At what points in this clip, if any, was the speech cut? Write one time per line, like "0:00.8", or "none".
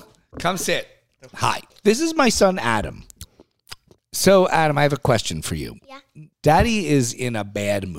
0:01.3
0:06.3